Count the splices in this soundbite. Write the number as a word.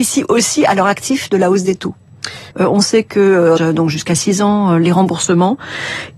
two